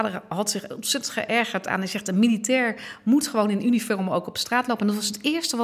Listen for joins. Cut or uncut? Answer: uncut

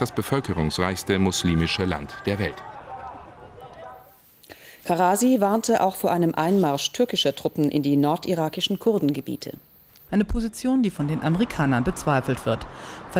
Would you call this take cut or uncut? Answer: cut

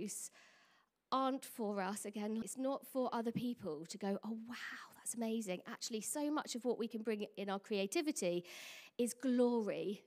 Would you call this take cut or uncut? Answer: cut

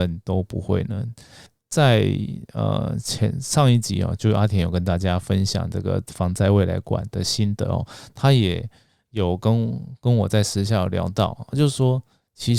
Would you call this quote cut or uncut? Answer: uncut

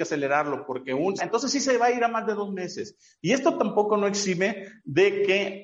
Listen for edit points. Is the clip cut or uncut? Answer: cut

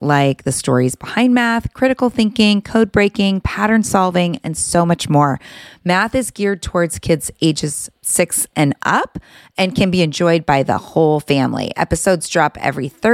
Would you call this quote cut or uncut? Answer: uncut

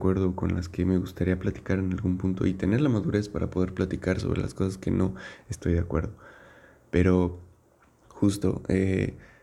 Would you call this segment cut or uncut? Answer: uncut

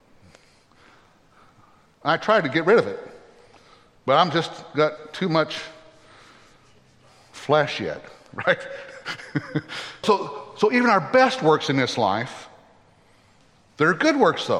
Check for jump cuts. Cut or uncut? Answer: cut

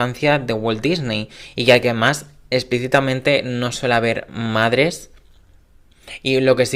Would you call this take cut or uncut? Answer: uncut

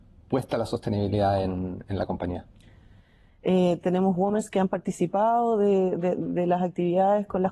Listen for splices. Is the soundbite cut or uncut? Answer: cut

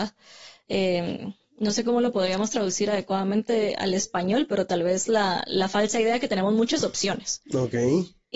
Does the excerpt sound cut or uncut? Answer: uncut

